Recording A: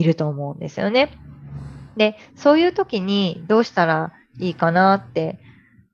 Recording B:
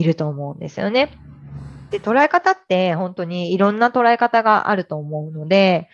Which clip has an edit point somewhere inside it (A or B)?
B